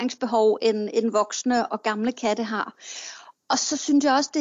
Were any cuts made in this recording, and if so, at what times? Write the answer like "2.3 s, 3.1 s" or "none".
1.7 s